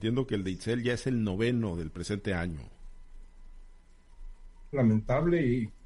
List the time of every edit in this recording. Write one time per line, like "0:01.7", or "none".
0:04.7